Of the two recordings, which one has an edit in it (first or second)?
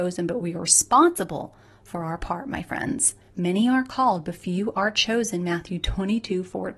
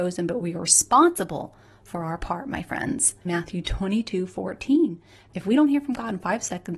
second